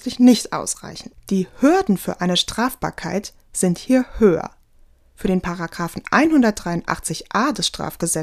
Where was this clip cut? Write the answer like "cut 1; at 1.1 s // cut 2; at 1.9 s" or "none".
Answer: none